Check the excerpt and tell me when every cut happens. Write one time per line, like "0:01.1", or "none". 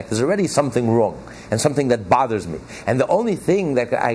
none